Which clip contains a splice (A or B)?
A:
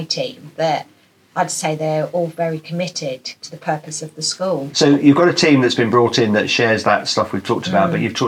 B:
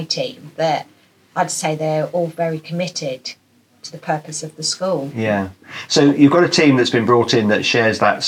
A